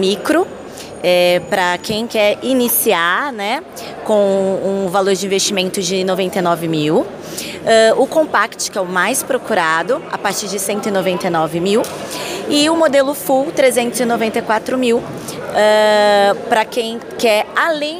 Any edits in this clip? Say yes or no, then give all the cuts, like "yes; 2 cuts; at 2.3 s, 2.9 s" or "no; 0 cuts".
no; 0 cuts